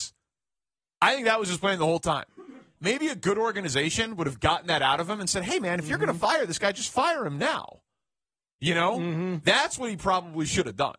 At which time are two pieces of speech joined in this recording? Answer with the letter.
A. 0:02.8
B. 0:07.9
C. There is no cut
A